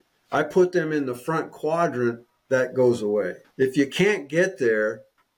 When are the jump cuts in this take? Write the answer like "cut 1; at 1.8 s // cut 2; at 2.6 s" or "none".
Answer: cut 1; at 3.5 s